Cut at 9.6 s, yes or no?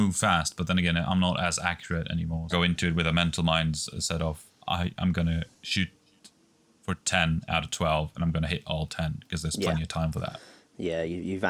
no